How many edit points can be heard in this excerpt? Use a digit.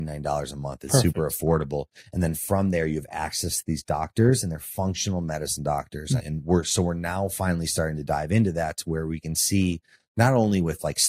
1